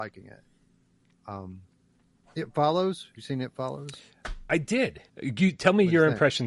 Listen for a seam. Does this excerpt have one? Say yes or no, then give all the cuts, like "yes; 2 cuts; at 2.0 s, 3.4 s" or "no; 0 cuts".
yes; 1 cut; at 5.1 s